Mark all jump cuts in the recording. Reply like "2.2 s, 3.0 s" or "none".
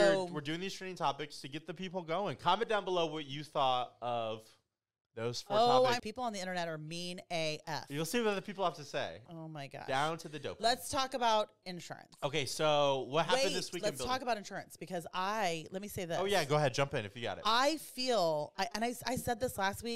6.0 s, 9.3 s